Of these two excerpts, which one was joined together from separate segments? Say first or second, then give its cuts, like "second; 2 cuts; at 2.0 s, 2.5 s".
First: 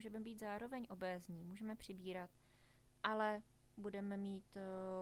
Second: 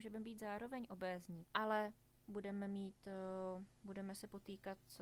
second; 2 cuts; at 1.4 s, 3.7 s